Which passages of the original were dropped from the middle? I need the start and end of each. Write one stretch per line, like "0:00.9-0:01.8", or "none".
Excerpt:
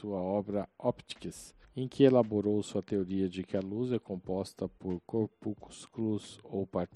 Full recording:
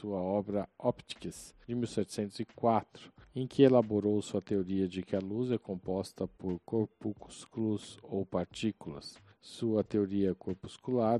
0:01.6-0:03.2